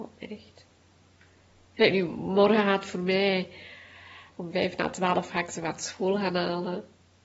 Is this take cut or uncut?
uncut